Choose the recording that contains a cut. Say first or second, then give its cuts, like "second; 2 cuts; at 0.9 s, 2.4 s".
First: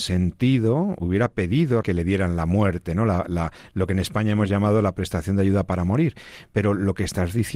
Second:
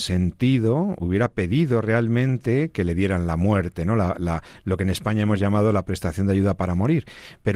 first; 1 cut; at 1.8 s